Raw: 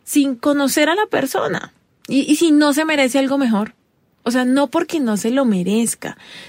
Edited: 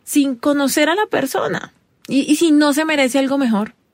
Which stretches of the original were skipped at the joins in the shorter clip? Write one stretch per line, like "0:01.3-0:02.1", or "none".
none